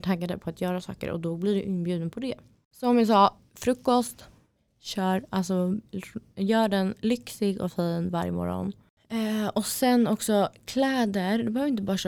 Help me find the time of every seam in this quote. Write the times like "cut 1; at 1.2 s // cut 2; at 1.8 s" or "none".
none